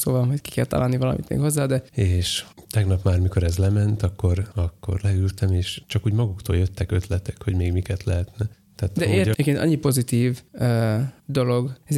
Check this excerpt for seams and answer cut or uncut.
cut